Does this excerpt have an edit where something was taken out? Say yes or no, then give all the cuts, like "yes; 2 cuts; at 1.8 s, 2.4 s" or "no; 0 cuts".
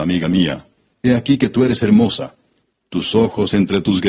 no; 0 cuts